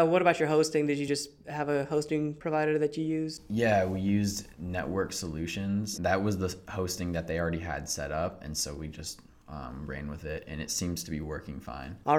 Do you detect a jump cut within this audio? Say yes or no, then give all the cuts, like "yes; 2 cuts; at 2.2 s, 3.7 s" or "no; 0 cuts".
no; 0 cuts